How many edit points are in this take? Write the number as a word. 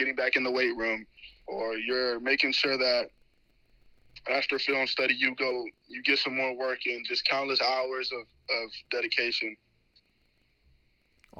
one